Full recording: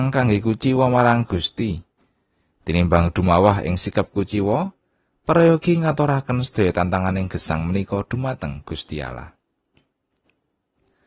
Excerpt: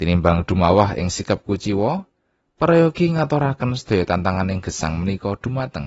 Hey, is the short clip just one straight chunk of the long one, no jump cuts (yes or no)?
yes